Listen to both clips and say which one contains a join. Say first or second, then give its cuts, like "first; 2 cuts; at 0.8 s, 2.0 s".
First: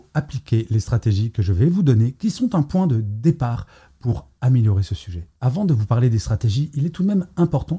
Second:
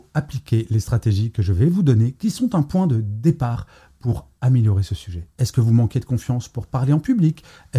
second; 1 cut; at 5.4 s